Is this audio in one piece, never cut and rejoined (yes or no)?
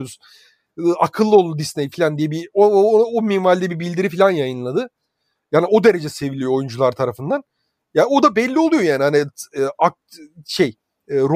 yes